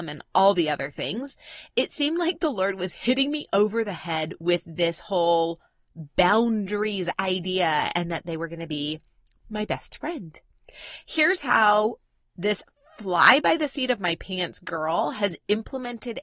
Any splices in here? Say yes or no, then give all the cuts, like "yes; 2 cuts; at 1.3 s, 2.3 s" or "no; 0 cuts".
no; 0 cuts